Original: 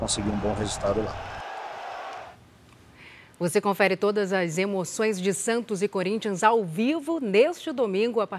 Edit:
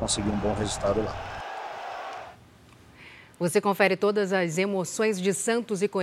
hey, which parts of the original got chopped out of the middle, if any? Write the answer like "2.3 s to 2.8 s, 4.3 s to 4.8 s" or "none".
none